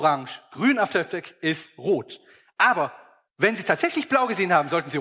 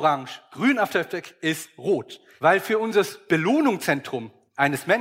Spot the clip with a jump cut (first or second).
second